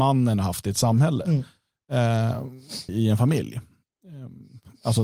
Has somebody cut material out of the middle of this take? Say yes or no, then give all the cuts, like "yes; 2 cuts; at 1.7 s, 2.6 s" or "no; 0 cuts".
yes; 1 cut; at 2.9 s